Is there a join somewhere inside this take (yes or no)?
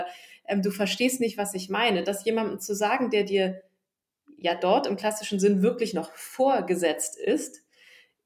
no